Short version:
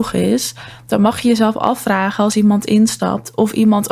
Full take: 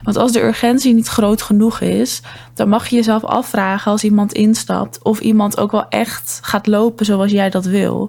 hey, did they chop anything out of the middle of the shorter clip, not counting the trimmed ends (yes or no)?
no